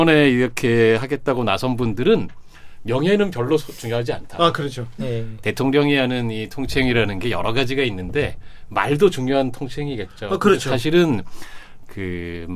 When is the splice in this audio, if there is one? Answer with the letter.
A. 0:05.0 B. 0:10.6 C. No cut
A